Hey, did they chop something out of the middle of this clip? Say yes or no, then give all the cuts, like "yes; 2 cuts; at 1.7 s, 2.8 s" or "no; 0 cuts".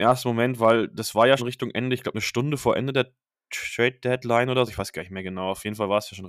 yes; 2 cuts; at 1.4 s, 4.7 s